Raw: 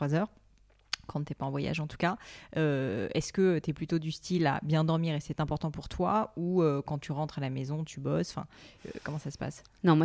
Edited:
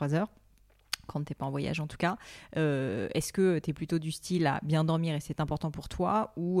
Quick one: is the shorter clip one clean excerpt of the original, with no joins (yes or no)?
yes